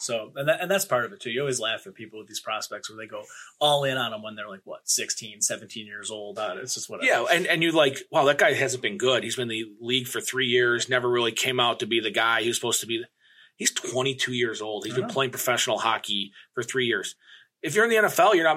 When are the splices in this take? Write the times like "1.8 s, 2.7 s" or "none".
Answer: 6.4 s